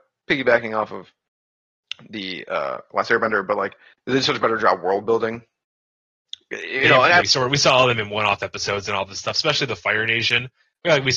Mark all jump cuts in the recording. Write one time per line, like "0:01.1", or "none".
0:07.2

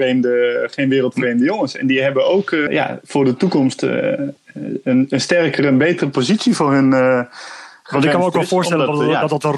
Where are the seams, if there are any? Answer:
0:02.7

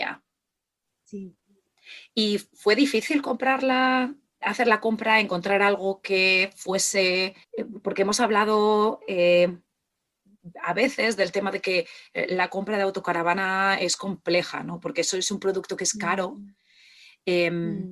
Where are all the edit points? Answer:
0:04.4
0:07.4

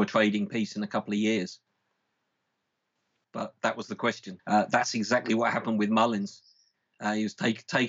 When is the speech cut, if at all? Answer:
0:03.2
0:04.4

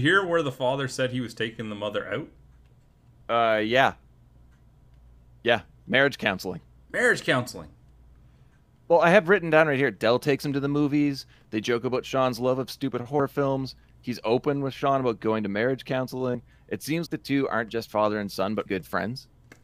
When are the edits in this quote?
0:17.1
0:18.7

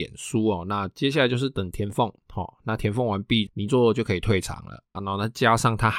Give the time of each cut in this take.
0:03.5
0:04.9

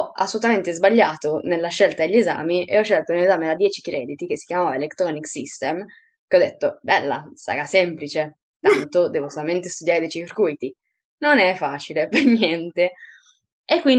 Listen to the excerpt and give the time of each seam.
none

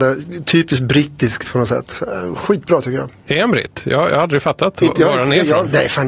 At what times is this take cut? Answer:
none

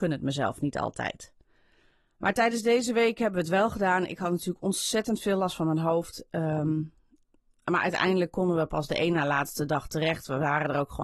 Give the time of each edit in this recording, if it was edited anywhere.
none

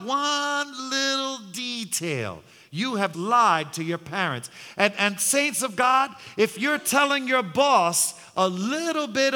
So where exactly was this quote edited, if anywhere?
0:03.1

